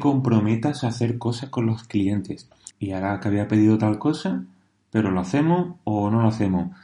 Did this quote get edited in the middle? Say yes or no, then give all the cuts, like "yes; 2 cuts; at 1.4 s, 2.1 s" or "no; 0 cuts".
yes; 1 cut; at 2.7 s